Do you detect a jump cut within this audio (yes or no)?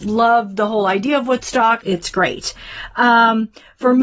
yes